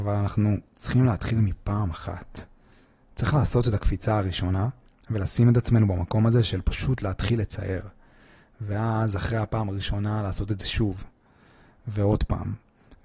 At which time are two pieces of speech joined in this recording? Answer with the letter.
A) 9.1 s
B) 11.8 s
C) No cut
C